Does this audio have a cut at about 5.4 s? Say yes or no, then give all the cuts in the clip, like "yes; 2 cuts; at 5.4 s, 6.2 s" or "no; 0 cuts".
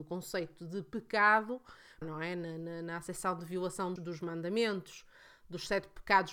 no; 2 cuts; at 2.0 s, 4.0 s